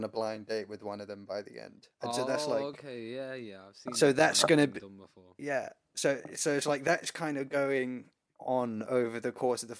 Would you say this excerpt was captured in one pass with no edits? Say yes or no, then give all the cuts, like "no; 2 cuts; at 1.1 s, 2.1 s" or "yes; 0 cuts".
yes; 0 cuts